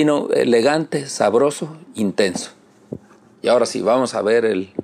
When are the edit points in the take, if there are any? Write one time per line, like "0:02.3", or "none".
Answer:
none